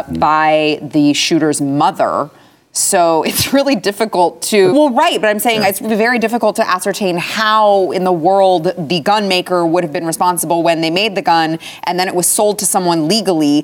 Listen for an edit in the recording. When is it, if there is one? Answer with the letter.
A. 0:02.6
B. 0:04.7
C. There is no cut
B